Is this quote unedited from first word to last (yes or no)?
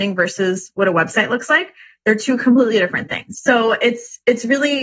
no